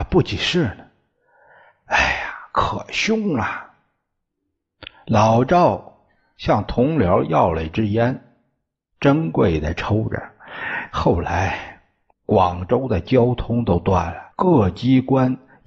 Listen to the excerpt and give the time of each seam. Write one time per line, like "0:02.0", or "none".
0:12.1
0:14.3